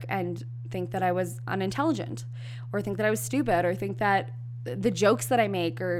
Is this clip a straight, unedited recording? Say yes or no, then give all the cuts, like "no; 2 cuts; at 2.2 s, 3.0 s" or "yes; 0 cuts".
yes; 0 cuts